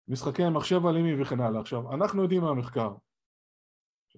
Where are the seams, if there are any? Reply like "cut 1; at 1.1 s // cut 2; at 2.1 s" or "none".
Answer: none